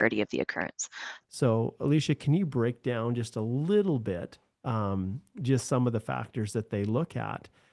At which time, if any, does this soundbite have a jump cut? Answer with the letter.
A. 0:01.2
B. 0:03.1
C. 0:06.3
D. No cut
A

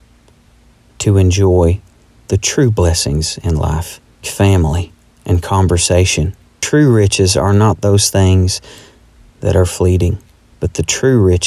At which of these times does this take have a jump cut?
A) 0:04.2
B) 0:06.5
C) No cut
A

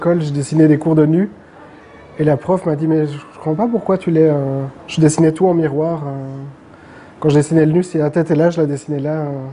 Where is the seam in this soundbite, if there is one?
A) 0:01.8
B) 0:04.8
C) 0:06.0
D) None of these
D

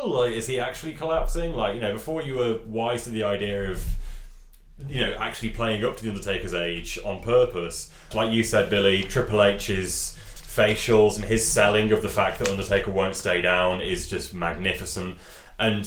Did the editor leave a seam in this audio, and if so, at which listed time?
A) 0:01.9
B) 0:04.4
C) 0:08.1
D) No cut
C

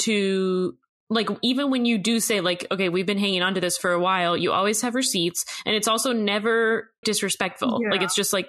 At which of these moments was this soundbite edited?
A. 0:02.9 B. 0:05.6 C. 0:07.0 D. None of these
C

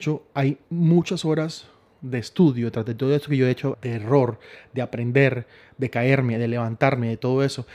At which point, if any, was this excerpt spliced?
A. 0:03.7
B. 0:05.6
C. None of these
A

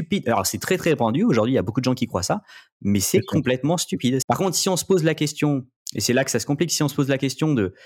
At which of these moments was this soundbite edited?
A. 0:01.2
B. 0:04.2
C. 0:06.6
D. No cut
B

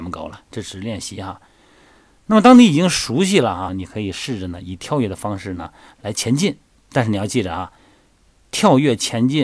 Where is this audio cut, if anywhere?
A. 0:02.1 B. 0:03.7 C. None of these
B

